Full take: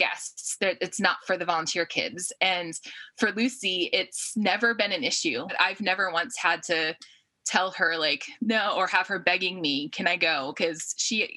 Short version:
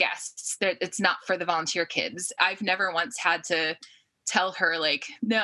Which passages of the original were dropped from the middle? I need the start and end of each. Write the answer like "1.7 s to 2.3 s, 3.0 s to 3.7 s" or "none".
2.4 s to 5.6 s